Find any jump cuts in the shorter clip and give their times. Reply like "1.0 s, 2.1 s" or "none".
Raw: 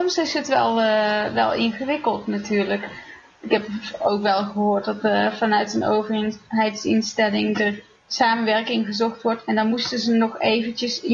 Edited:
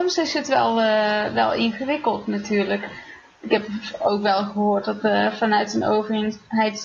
none

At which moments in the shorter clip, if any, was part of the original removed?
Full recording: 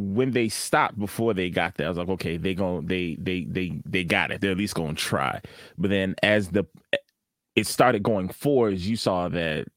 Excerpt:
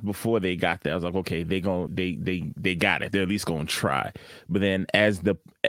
1.9 s

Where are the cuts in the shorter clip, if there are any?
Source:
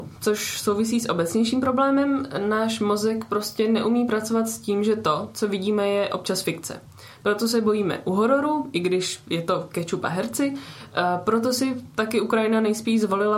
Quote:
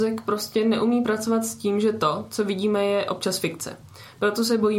none

